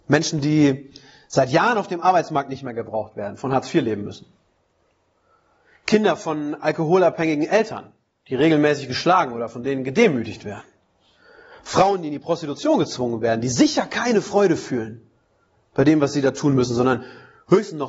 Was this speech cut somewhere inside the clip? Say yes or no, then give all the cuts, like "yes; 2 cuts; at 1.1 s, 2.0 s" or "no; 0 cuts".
no; 0 cuts